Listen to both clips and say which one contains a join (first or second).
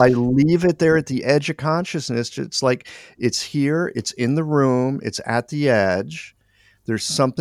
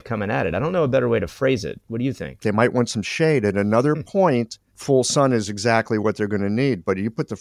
second